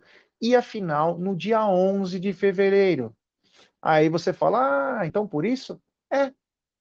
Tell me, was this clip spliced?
no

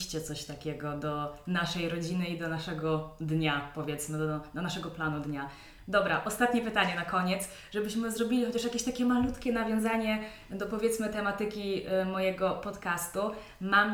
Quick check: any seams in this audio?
no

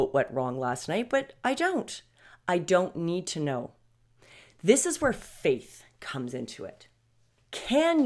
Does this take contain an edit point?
no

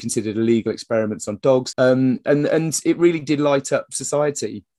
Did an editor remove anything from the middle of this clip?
yes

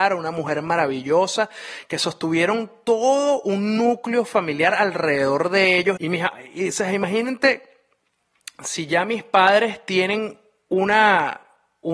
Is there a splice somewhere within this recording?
yes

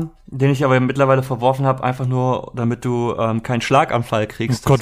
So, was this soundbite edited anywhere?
no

